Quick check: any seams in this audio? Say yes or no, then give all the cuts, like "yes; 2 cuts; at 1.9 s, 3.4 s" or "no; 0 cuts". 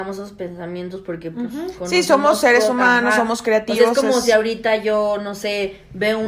no; 0 cuts